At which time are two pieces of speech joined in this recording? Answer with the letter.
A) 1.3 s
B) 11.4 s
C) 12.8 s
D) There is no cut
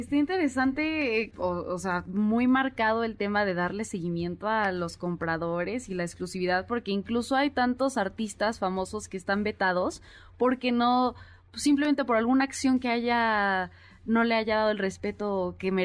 A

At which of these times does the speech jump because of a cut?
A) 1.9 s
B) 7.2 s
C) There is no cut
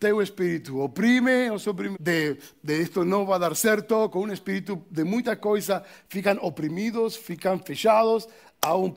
A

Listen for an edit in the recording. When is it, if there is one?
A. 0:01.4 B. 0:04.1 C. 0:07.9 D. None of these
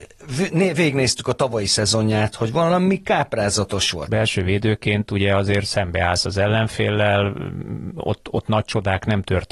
B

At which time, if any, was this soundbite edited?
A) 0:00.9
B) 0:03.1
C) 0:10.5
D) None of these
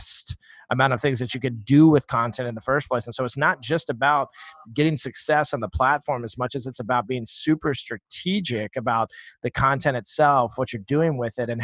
D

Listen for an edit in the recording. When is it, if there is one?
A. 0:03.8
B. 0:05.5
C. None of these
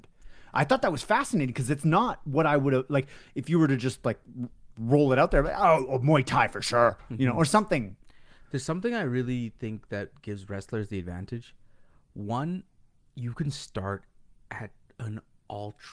C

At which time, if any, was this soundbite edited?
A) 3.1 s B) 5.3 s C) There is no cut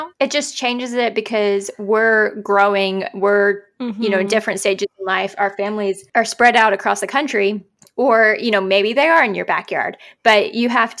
C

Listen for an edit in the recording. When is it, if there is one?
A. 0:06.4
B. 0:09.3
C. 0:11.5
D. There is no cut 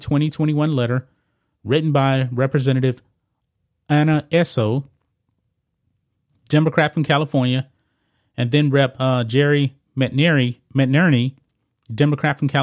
D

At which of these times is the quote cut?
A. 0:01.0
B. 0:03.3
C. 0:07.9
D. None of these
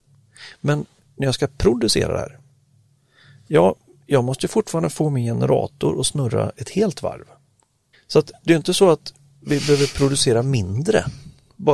C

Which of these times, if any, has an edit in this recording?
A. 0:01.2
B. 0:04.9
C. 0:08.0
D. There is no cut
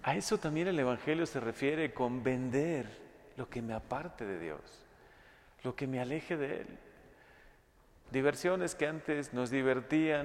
C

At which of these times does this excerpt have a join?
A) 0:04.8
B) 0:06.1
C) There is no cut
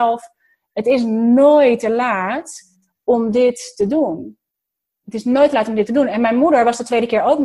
C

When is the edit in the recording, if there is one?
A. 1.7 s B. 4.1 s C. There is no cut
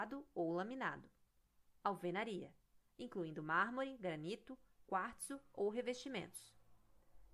C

